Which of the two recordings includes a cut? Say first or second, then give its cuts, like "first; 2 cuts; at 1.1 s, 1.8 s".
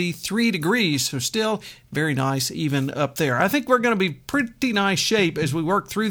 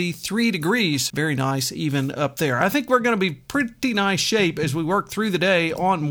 second; 1 cut; at 1.1 s